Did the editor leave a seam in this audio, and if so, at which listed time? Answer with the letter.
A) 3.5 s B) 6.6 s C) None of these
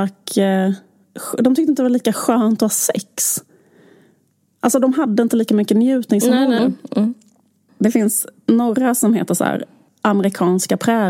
B